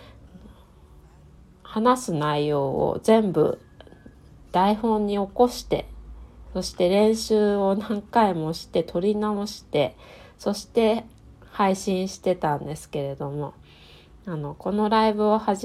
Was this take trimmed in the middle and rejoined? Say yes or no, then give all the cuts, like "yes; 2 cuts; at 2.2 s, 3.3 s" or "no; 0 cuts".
no; 0 cuts